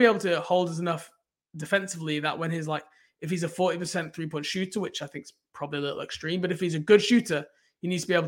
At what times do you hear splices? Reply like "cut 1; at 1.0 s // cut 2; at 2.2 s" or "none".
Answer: none